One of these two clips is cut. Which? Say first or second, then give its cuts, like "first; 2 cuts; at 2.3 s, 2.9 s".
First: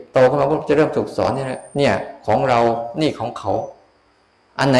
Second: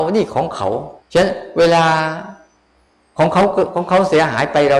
second; 1 cut; at 1.0 s